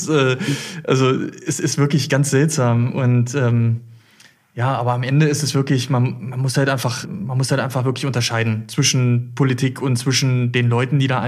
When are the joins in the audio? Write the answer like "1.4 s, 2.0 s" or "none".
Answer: 7.0 s